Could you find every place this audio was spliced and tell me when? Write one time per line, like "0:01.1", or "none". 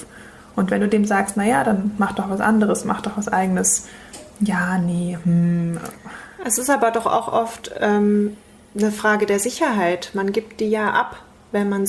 none